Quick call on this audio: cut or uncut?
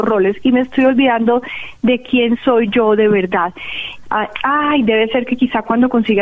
cut